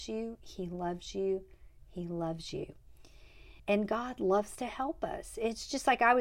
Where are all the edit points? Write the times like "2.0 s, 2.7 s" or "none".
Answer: 3.6 s